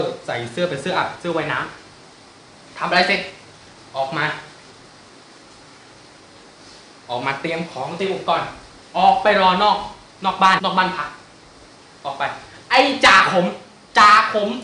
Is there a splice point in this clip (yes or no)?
yes